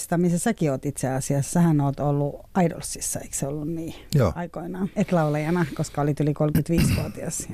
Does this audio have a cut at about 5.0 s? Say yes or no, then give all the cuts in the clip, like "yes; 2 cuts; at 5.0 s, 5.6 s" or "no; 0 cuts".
yes; 1 cut; at 5.0 s